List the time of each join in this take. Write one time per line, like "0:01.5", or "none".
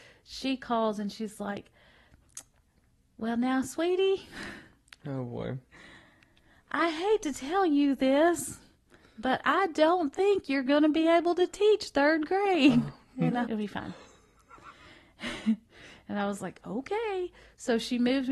0:13.4